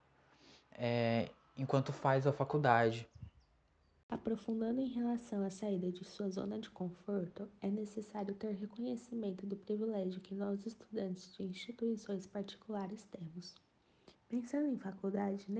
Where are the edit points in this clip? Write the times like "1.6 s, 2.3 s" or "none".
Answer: 14.1 s